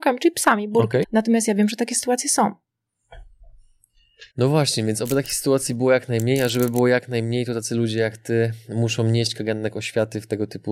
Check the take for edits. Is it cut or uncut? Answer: cut